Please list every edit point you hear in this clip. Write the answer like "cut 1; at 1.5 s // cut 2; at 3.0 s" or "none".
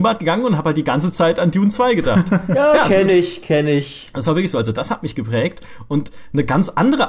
cut 1; at 4.7 s